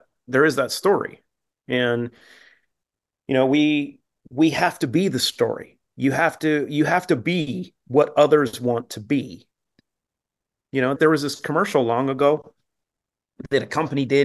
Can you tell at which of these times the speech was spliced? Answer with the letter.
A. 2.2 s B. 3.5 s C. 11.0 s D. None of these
C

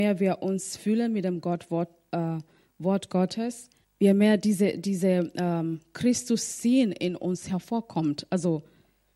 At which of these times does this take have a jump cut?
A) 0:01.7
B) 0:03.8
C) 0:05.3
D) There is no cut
B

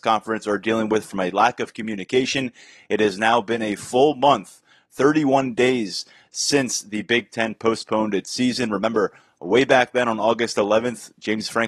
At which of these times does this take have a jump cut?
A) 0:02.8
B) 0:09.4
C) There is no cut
C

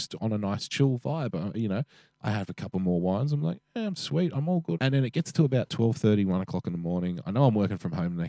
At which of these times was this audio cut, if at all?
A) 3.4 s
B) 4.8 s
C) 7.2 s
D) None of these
B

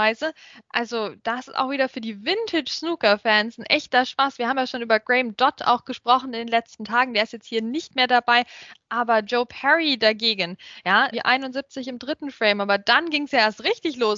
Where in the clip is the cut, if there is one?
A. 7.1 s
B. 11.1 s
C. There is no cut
B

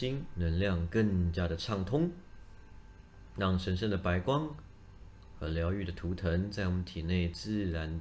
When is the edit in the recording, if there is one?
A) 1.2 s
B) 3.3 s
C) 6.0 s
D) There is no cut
D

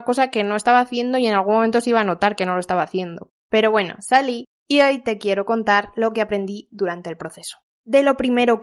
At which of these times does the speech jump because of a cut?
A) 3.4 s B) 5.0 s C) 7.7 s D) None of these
A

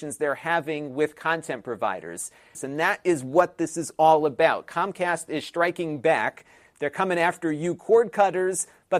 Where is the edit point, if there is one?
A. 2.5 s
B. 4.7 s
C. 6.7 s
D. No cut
A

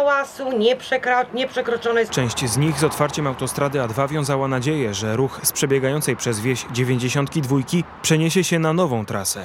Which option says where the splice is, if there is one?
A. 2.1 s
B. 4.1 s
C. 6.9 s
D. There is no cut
A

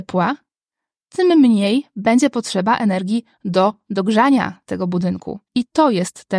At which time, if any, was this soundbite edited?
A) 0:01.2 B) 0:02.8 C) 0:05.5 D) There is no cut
C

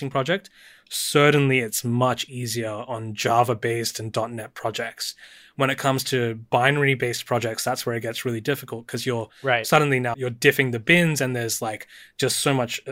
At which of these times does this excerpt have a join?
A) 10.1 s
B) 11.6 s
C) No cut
A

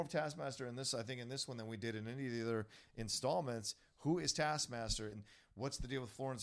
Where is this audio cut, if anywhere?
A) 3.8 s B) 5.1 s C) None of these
B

